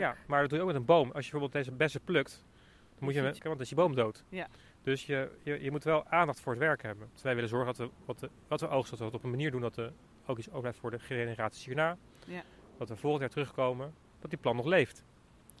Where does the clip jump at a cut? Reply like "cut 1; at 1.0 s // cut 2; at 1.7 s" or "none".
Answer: cut 1; at 3.4 s // cut 2; at 7.2 s